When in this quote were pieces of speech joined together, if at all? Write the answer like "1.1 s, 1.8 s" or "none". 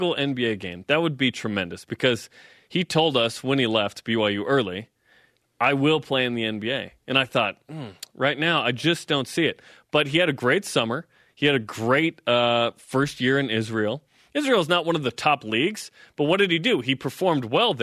none